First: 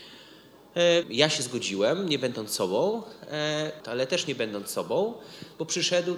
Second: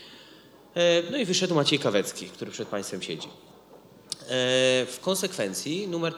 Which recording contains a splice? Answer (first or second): first